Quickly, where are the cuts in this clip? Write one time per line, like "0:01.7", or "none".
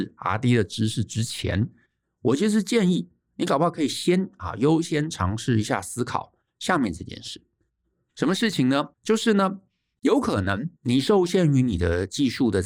0:08.9
0:10.8